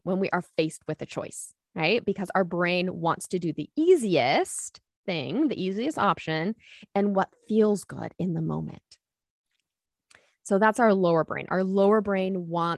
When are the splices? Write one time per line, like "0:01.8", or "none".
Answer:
none